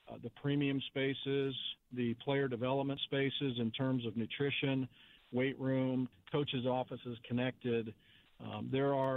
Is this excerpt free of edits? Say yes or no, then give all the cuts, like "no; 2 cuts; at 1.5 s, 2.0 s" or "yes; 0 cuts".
no; 1 cut; at 6.1 s